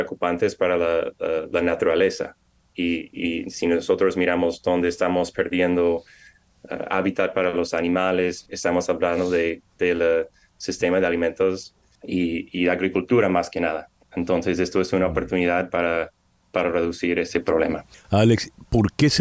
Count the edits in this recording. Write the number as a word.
one